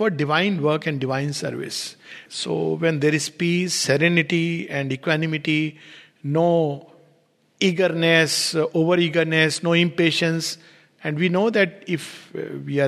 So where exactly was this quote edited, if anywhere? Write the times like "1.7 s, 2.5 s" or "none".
2.3 s